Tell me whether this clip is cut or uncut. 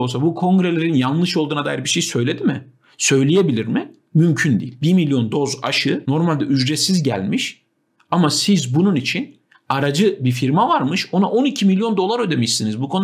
cut